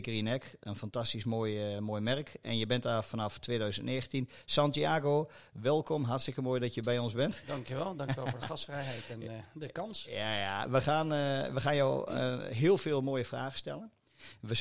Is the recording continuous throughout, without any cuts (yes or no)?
yes